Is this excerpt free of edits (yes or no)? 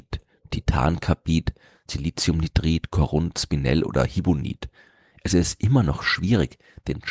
yes